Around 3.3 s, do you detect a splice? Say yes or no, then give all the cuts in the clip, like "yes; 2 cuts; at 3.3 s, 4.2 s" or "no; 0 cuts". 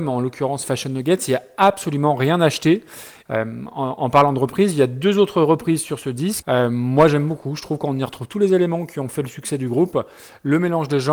yes; 2 cuts; at 3.3 s, 6.4 s